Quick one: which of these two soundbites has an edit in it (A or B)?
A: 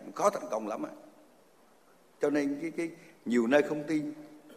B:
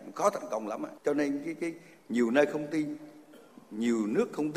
B